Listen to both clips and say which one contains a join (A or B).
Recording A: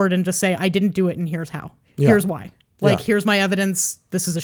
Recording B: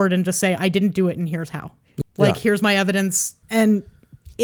B